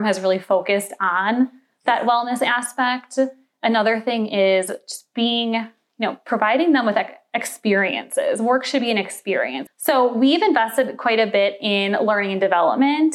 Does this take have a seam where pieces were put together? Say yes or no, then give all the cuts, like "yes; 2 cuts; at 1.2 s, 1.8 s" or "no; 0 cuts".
yes; 1 cut; at 9.7 s